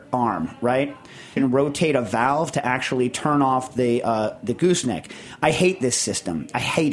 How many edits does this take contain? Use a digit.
1